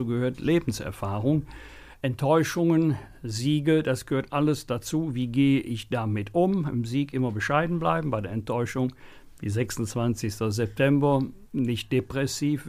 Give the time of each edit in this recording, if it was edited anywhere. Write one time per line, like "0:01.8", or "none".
none

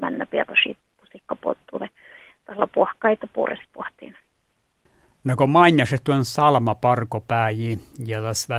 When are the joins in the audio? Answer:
none

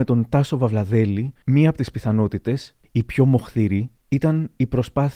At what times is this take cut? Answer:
0:01.4

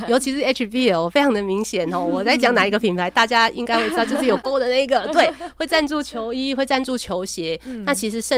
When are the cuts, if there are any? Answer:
0:04.4

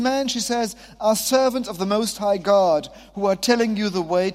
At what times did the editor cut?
none

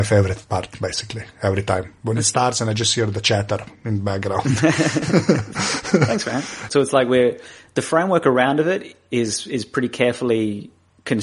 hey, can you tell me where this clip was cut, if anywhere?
0:06.7

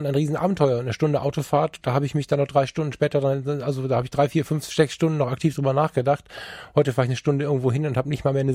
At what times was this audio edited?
none

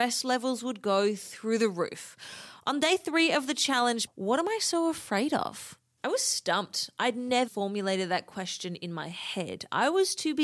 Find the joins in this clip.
0:04.1
0:07.5

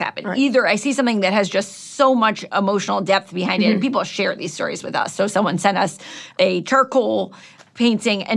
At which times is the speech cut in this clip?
none

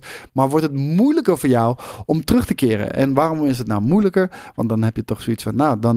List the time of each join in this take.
none

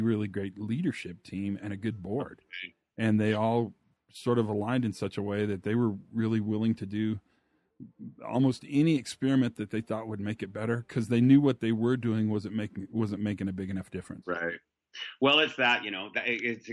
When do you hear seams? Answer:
none

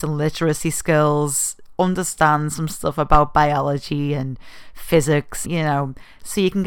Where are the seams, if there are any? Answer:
0:05.4

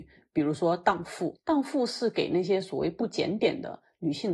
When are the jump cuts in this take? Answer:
none

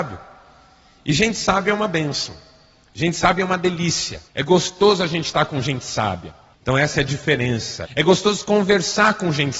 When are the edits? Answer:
0:04.3
0:06.5
0:07.8

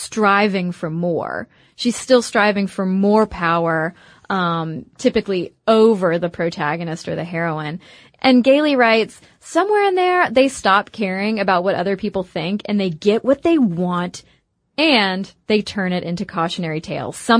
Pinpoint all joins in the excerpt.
none

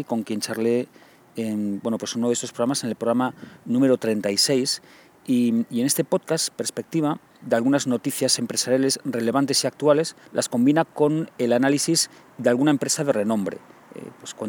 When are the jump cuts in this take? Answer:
0:07.4
0:10.2

